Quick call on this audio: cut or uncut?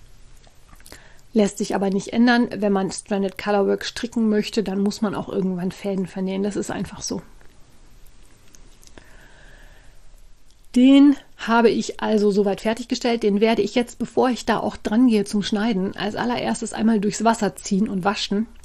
uncut